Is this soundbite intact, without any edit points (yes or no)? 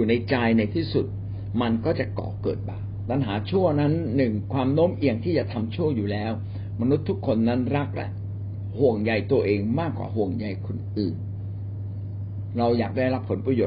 yes